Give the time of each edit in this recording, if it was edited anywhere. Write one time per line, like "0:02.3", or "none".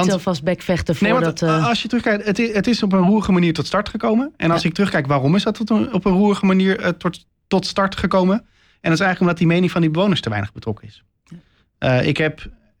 none